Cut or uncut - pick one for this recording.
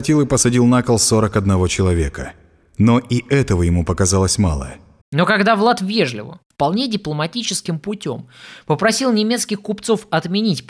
cut